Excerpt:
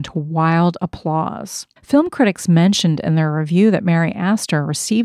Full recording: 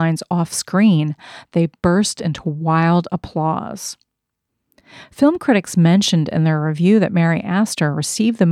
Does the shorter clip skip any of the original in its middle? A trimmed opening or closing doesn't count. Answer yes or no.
yes